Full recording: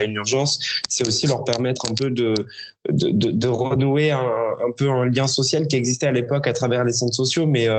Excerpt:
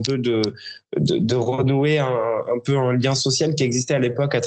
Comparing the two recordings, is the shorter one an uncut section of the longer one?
no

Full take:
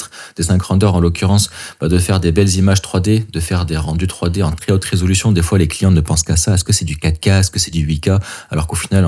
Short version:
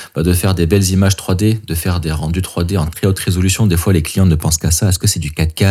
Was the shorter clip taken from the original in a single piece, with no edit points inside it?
yes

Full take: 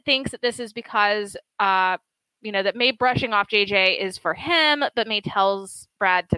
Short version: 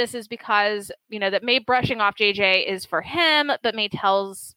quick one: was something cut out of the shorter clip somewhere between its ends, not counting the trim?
yes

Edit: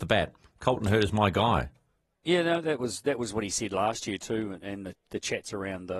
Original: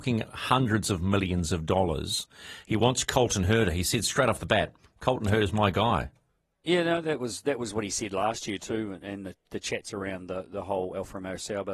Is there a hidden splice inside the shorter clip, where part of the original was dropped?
no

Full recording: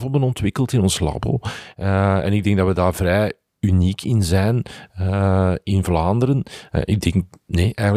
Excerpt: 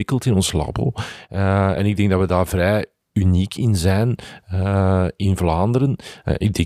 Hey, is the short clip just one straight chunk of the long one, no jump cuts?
yes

